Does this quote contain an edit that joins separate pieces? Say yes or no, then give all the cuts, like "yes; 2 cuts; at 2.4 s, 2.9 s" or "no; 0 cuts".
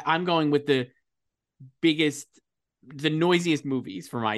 no; 0 cuts